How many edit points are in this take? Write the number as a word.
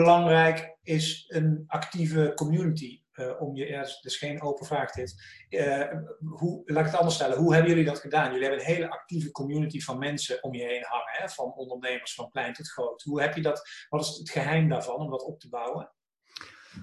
zero